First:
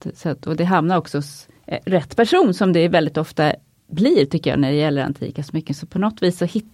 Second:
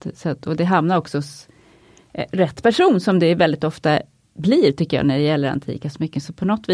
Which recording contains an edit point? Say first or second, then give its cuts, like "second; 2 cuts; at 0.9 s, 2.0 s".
first; 1 cut; at 1.6 s